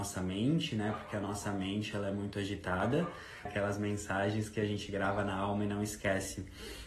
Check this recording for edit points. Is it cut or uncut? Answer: cut